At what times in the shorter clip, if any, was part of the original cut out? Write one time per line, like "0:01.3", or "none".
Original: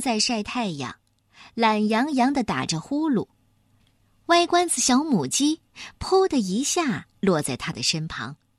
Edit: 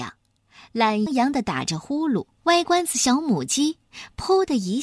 0:01.1
0:02.4